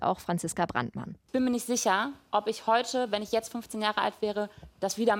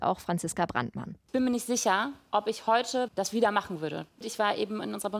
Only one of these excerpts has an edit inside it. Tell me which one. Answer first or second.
second